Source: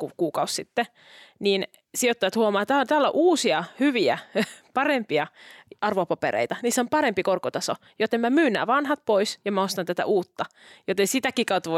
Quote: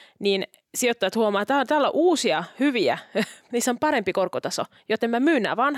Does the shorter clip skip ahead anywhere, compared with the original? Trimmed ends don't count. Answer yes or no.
yes